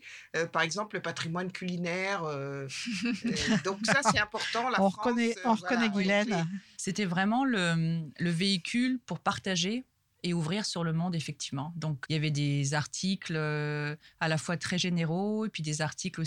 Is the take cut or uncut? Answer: cut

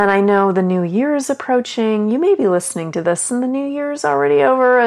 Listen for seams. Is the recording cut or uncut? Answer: uncut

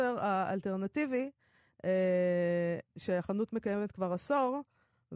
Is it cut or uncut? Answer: uncut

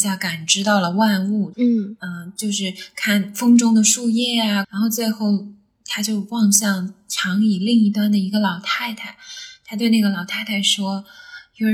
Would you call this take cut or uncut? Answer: cut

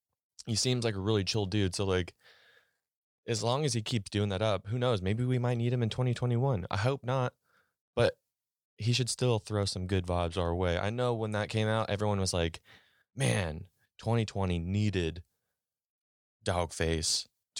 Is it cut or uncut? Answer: uncut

